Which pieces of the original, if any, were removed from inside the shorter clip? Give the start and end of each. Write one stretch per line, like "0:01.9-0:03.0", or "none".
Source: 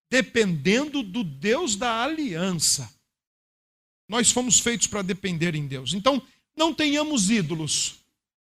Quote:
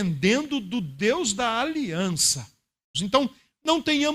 0:03.4-0:05.9